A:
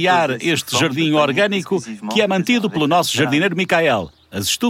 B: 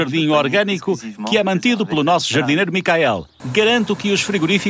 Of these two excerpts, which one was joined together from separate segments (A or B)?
B